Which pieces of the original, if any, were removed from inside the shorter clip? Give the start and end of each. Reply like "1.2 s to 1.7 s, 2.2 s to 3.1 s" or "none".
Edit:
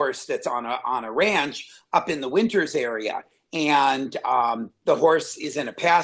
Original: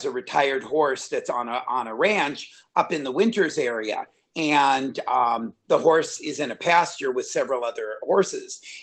none